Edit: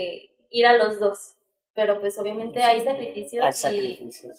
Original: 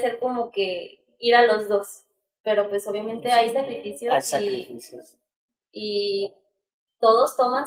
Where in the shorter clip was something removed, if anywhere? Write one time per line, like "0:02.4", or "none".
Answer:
none